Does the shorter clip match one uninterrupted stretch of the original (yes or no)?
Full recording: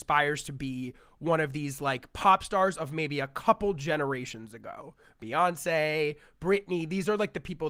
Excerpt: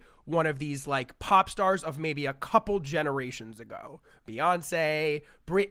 yes